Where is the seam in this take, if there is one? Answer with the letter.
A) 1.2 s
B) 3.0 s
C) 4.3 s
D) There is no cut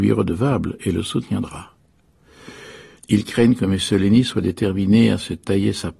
B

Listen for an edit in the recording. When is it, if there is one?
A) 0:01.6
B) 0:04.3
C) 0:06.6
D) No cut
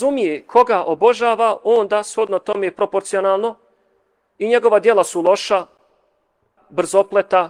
C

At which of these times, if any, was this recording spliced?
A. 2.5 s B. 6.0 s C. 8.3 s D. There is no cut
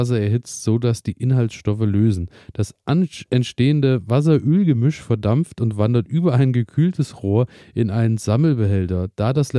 D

